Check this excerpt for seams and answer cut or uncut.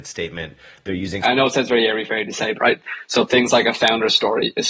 cut